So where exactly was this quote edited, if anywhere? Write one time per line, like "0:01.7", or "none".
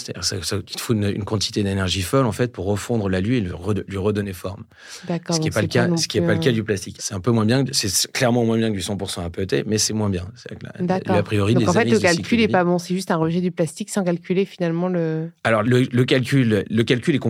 0:07.0
0:15.6

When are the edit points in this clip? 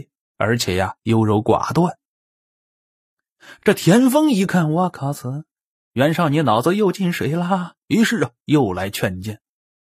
none

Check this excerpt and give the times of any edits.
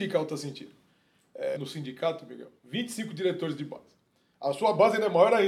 0:01.6

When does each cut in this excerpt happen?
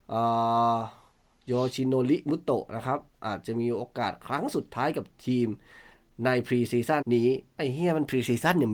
0:07.0

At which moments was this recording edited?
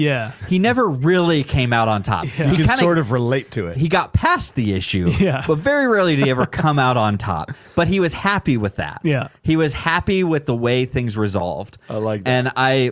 0:03.7

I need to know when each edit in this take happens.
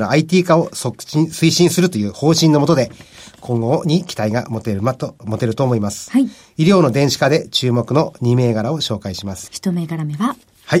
0:09.5

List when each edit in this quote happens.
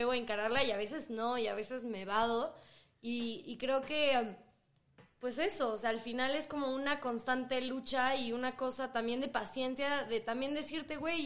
none

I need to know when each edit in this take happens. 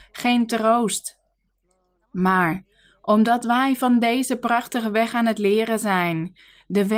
0:02.0

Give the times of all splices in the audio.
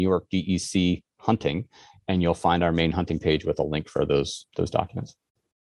none

